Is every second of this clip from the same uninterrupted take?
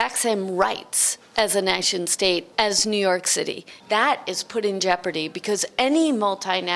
no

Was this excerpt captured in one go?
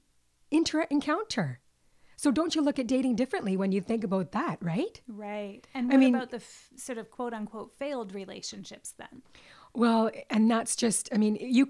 yes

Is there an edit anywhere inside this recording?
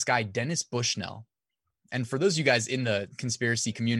yes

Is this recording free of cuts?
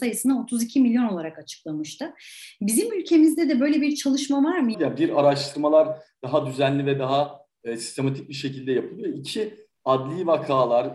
no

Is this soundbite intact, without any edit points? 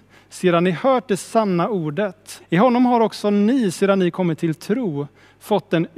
no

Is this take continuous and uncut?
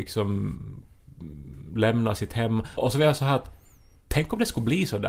yes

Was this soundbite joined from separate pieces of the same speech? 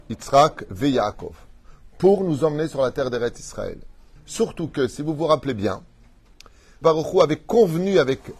yes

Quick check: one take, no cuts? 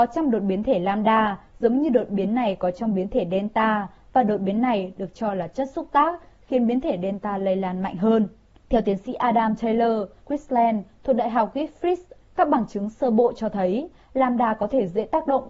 no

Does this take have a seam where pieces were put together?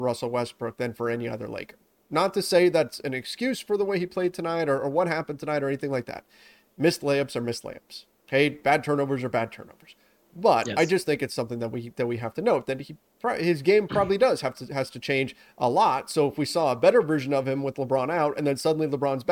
no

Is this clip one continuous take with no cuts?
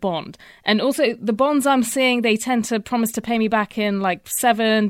yes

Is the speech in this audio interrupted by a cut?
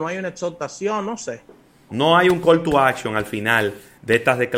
yes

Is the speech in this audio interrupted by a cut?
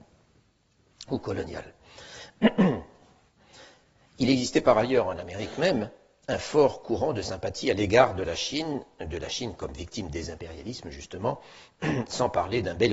no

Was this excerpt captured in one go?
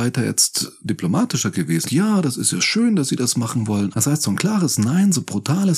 no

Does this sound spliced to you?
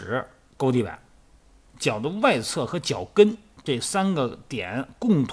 yes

